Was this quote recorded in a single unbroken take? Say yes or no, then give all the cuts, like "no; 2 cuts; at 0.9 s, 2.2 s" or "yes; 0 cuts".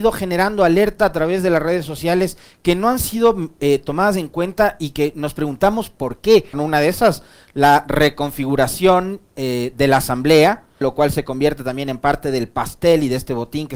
no; 2 cuts; at 6.5 s, 10.8 s